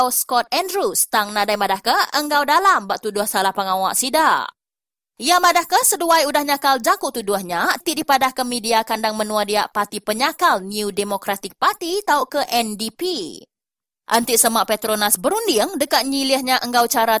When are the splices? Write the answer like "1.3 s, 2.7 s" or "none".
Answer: 7.8 s, 13.9 s

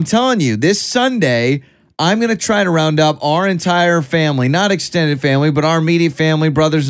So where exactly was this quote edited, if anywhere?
none

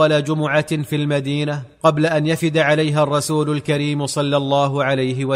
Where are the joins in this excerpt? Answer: 1.7 s

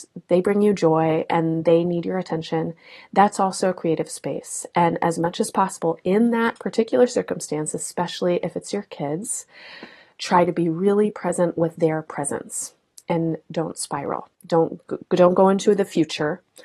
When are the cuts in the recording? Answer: 14.3 s

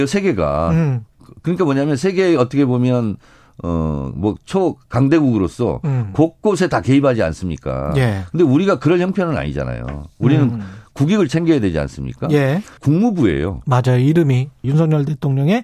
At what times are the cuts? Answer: 12.8 s, 14.6 s

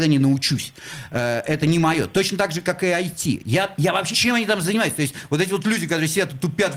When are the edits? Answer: 4.1 s

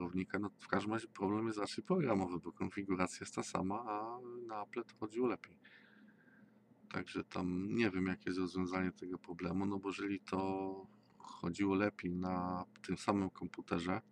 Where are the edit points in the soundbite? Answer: 6.8 s

